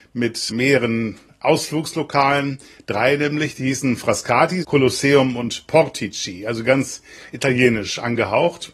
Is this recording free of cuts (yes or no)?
no